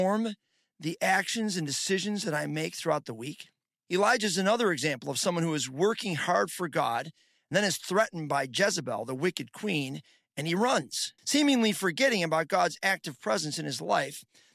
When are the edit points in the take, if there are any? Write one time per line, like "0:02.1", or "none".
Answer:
0:03.9
0:11.2